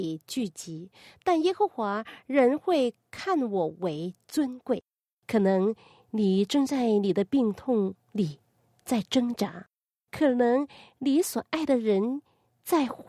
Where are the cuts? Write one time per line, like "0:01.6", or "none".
0:05.1